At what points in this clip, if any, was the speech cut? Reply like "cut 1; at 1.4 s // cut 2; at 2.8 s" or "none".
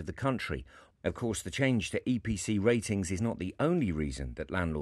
cut 1; at 0.9 s

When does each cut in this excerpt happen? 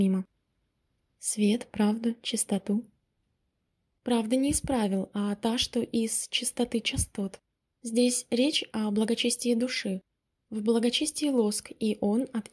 none

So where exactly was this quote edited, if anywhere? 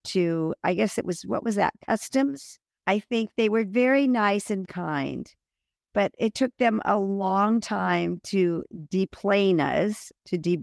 cut 1; at 2.8 s // cut 2; at 4.6 s

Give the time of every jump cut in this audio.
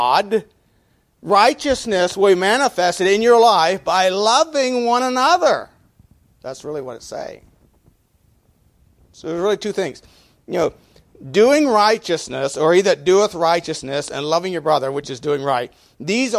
none

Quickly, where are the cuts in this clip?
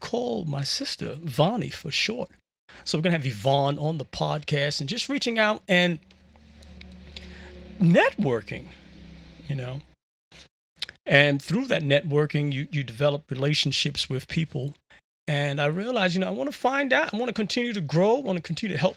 none

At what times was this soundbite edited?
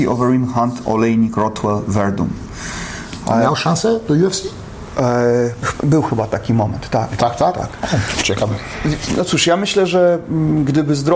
none

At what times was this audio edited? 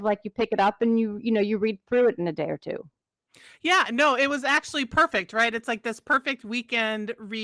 none

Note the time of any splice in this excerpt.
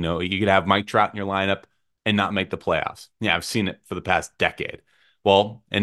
cut 1; at 1.9 s

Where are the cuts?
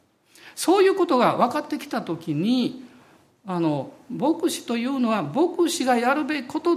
none

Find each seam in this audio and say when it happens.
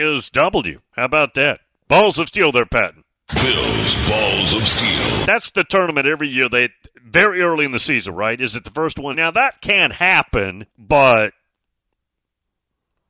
cut 1; at 5.2 s // cut 2; at 9.1 s // cut 3; at 10.7 s

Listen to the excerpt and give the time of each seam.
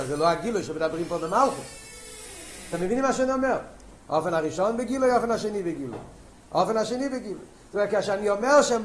cut 1; at 4.0 s

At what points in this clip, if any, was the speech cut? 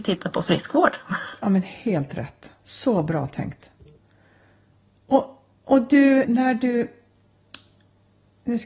cut 1; at 6.2 s

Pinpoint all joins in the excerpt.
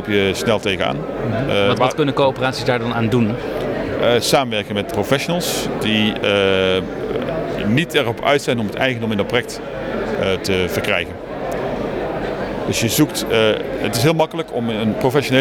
cut 1; at 4.9 s

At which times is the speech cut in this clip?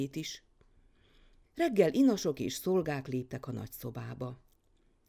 cut 1; at 1.4 s

